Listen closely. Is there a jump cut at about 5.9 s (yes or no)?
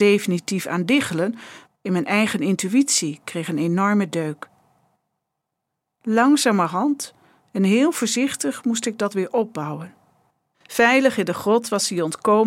no